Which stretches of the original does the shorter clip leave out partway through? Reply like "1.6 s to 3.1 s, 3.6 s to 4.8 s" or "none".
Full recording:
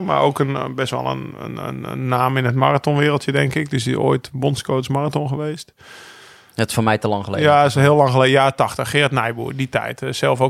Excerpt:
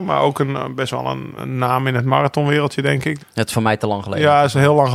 1.4 s to 1.9 s, 3.7 s to 6.4 s